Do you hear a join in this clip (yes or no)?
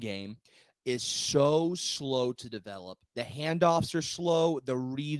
yes